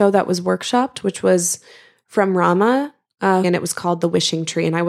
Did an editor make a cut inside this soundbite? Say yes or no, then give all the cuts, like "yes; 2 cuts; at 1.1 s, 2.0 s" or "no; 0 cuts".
yes; 1 cut; at 3.4 s